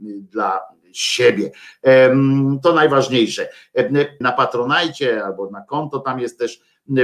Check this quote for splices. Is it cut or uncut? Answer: cut